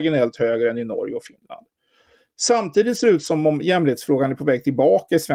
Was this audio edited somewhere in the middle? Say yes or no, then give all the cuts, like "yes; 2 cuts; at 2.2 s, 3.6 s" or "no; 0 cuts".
no; 0 cuts